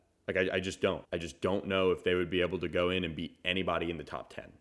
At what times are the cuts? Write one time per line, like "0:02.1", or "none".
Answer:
0:01.0

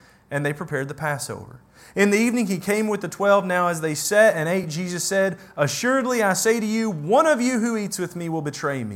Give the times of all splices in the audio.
none

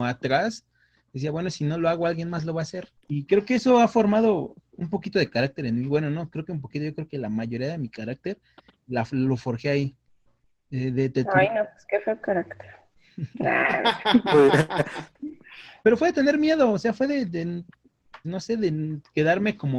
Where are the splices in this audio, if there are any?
0:03.0
0:18.2

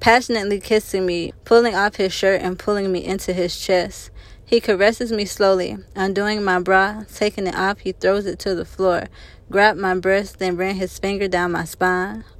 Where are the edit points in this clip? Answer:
0:01.3

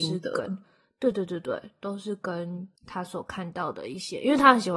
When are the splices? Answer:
0:01.1
0:02.8

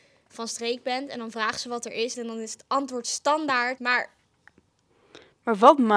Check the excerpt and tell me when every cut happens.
0:02.1
0:03.8

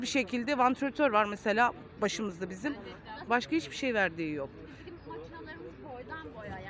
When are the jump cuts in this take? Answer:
0:03.3

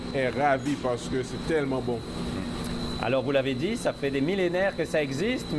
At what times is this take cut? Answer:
none

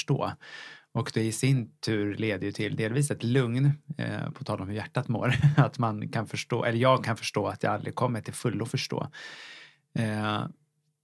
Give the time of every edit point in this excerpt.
none

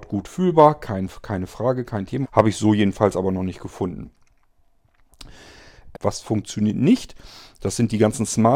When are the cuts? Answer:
0:02.2
0:05.9

